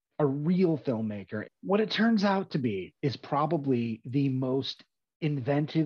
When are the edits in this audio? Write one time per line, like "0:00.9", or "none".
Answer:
0:01.4
0:03.0